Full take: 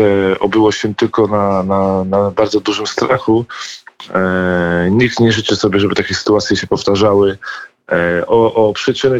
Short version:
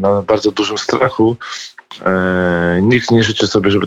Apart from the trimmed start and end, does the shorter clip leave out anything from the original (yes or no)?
no